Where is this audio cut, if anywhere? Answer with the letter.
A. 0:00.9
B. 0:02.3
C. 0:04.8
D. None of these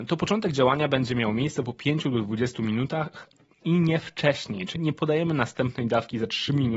C